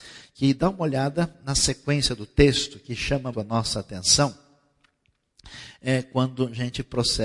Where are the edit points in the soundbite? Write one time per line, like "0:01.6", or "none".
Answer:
0:03.3